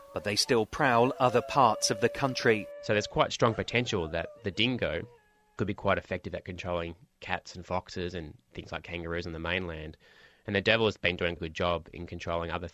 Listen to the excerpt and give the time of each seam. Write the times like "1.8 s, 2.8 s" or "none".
11.4 s